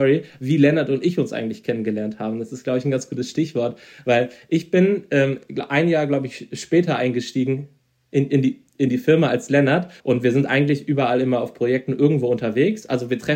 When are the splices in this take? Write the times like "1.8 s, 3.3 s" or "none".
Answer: 10.0 s

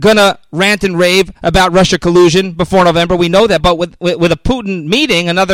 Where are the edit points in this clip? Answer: 3.6 s

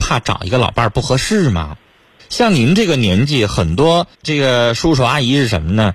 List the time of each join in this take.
2.2 s, 4.1 s

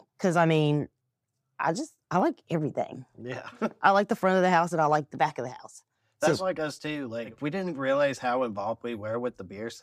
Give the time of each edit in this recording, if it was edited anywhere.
none

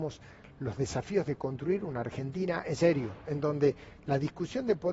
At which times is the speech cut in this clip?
none

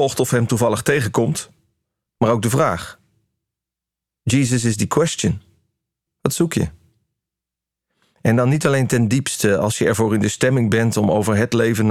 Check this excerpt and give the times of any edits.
2.1 s, 6.1 s

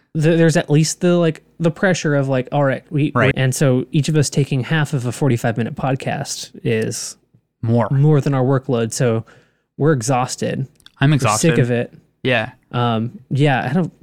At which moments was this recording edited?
3.3 s

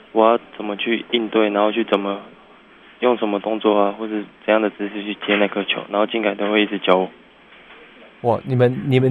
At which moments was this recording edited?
none

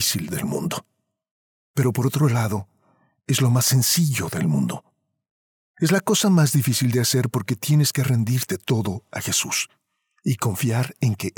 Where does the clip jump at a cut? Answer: none

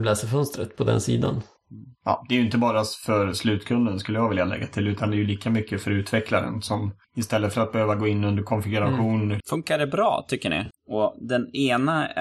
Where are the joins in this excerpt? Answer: 9.4 s, 10.7 s

